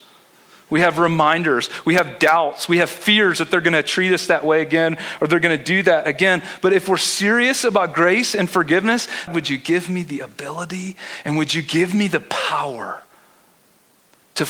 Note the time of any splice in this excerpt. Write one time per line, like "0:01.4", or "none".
0:09.3